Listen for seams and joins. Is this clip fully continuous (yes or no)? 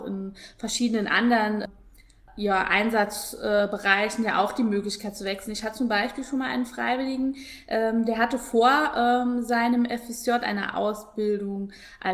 yes